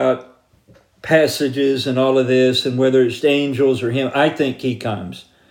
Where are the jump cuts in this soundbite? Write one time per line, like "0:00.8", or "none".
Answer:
0:03.2